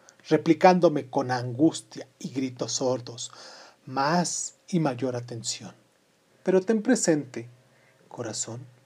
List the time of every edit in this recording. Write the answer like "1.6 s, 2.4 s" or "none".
6.3 s